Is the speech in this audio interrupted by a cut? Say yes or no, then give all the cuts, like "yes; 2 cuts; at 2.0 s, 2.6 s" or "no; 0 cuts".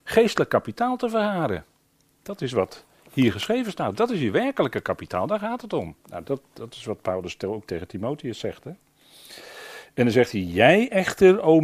yes; 1 cut; at 6.0 s